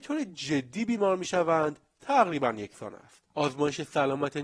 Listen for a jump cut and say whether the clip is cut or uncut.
cut